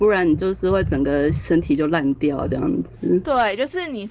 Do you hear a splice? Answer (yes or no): no